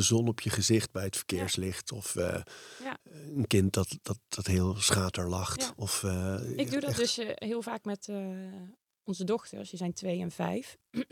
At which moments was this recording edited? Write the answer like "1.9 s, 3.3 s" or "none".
none